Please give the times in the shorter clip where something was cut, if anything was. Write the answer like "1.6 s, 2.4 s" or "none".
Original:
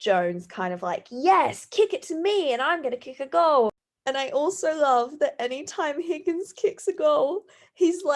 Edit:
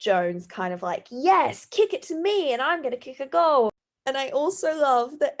none